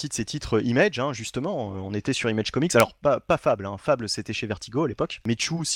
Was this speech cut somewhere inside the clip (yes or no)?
no